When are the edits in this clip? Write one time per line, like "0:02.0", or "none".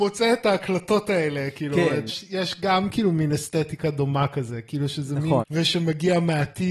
0:02.1
0:05.4